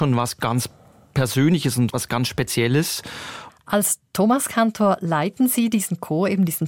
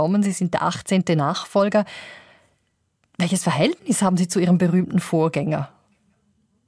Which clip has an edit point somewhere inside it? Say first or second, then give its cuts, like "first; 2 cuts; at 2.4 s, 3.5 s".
first; 2 cuts; at 1.9 s, 3.5 s